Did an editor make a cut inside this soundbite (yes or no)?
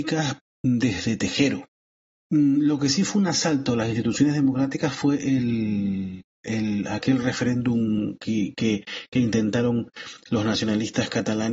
yes